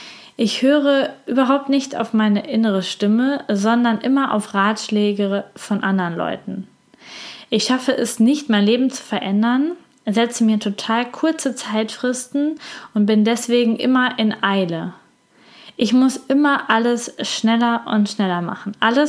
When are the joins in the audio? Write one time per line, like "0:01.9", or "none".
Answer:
none